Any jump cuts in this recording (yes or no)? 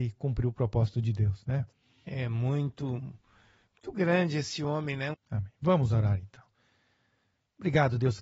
yes